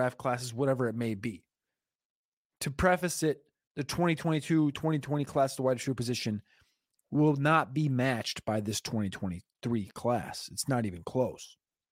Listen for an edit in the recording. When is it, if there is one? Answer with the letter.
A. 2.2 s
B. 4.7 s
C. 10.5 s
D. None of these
B